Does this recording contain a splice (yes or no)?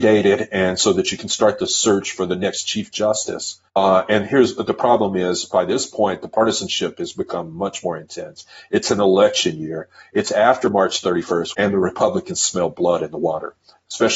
yes